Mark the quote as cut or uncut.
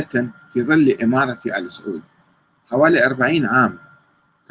uncut